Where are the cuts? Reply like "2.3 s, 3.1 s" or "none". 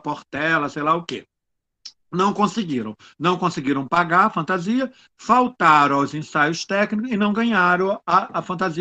none

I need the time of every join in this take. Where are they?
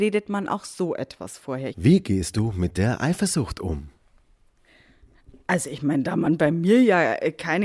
1.7 s

